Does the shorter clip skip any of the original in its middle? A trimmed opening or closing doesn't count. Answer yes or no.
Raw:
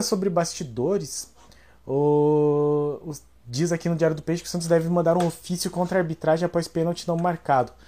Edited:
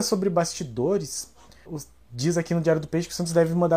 yes